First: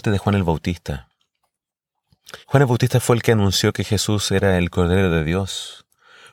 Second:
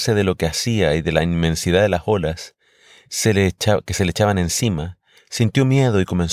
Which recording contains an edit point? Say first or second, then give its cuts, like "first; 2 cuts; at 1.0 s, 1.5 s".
first; 1 cut; at 2.4 s